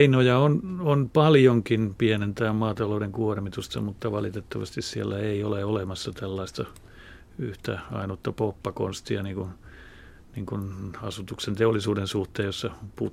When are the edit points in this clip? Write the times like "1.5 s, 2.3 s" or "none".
none